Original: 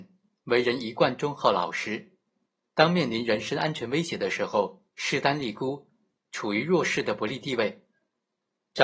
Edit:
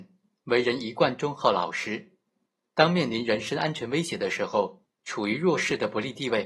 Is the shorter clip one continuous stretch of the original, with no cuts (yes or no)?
no